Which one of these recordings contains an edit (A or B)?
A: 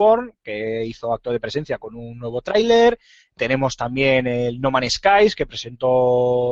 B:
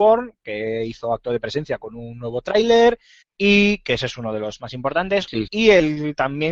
B